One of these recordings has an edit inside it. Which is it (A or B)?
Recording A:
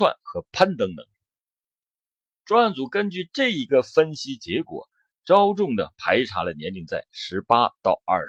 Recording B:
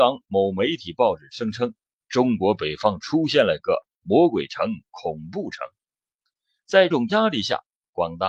B